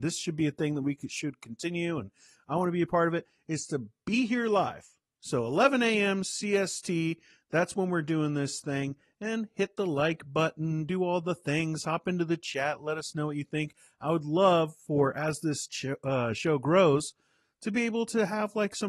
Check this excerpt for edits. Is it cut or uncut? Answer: uncut